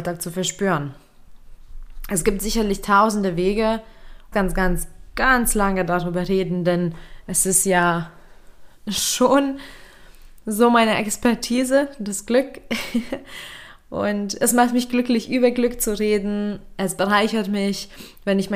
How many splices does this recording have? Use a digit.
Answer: 1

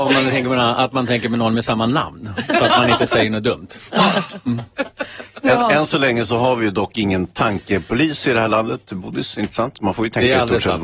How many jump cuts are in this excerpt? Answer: 0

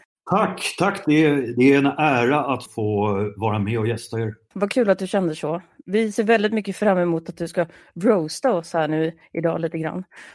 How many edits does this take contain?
1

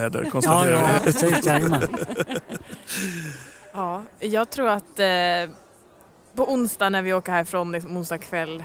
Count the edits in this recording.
1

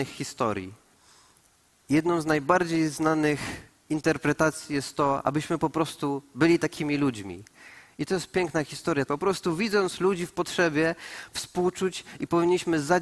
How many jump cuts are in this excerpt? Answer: 2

